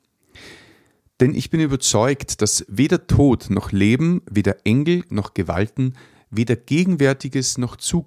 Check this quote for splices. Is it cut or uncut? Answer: uncut